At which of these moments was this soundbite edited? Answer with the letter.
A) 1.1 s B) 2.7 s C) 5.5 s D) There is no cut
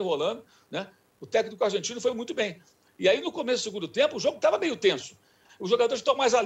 C